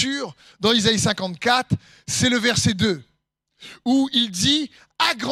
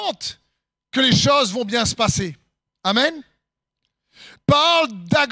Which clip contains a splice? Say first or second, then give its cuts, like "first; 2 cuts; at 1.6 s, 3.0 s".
second; 1 cut; at 4.4 s